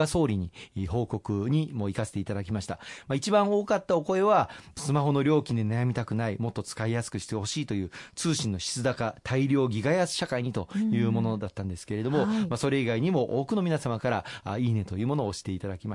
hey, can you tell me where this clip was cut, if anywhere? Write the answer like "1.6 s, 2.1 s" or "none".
none